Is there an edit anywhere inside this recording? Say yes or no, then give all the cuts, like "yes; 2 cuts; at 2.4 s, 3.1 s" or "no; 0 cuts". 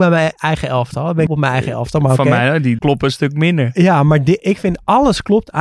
yes; 2 cuts; at 1.3 s, 2.8 s